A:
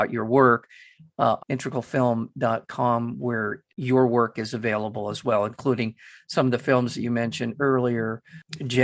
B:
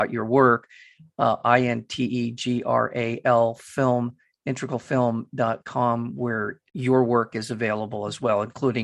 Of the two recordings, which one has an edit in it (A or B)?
A